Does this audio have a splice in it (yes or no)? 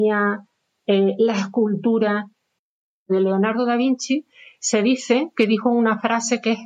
no